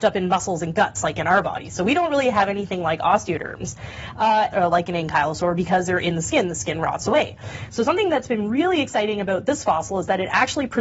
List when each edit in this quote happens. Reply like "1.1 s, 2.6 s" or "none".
4.5 s